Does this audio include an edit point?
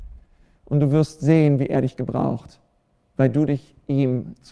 no; 0 cuts

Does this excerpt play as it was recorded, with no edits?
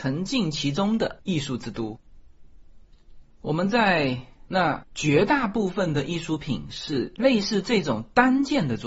no; 2 cuts; at 3.4 s, 4.5 s

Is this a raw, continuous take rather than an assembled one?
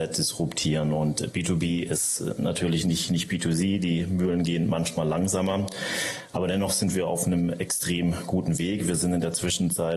yes; 0 cuts

